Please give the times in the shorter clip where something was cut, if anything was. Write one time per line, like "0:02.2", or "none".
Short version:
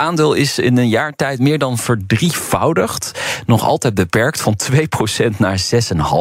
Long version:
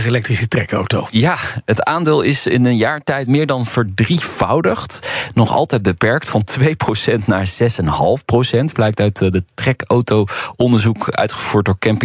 none